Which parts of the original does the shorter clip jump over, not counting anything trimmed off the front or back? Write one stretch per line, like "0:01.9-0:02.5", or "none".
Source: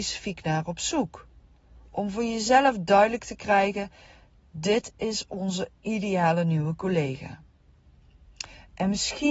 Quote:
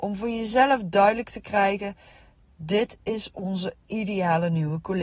none